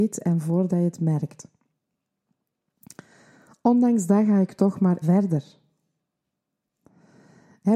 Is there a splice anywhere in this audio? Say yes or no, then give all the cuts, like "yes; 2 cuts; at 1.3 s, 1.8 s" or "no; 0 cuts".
yes; 1 cut; at 5.0 s